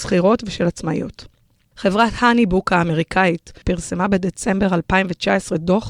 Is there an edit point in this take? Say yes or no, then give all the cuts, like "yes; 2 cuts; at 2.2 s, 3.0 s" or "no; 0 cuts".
yes; 1 cut; at 3.6 s